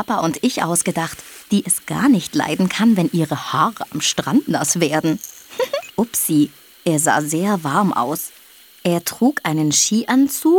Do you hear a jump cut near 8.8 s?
no; 2 cuts; at 1.4 s, 5.9 s

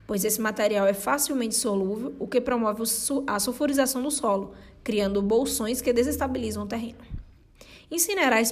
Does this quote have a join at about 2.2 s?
no; 0 cuts

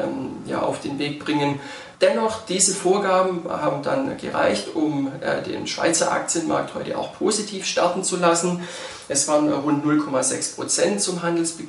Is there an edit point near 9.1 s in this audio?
no; 1 cut; at 1.9 s

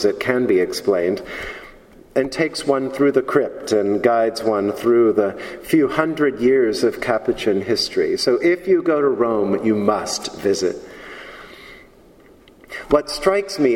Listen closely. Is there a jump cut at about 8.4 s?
no; 0 cuts

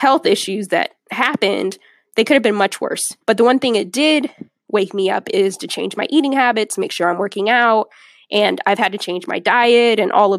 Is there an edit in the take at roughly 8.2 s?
no; 1 cut; at 3.2 s

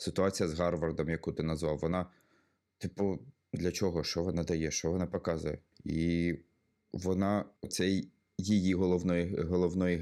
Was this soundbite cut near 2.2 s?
no; 3 cuts; at 3.6 s, 5.7 s, 7.6 s

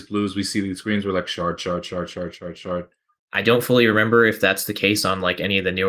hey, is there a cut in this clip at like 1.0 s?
no; 1 cut; at 3.2 s

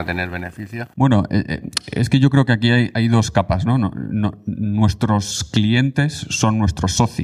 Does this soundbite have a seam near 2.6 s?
no; 1 cut; at 0.9 s

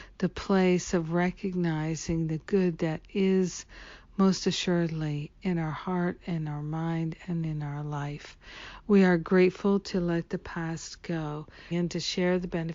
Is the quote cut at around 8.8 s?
no; 1 cut; at 11.7 s

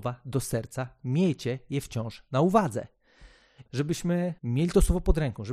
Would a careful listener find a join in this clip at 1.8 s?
no; 1 cut; at 3.7 s

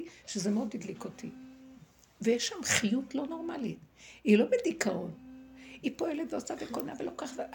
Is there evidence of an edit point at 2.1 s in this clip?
no; 0 cuts

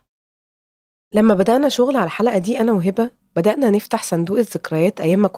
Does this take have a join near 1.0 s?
no; 0 cuts

